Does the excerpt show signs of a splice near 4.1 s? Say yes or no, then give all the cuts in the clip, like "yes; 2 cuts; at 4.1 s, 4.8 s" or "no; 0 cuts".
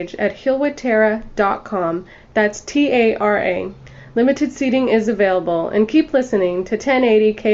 no; 0 cuts